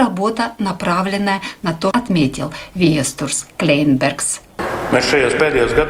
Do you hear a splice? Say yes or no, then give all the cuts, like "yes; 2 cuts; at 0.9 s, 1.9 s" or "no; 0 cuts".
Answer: yes; 1 cut; at 1.9 s